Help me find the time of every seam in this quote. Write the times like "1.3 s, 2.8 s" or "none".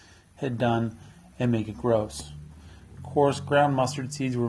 3.0 s